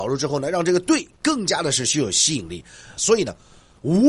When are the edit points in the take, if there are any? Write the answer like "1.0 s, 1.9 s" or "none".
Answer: 3.0 s